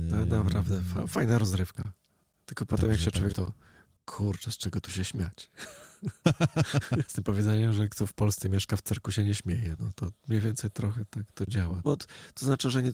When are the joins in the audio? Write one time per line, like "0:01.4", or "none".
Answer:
0:03.3
0:07.1
0:11.8